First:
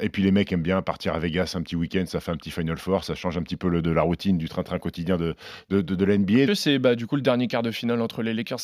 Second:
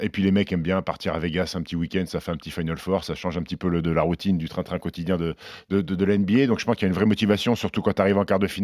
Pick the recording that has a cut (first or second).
first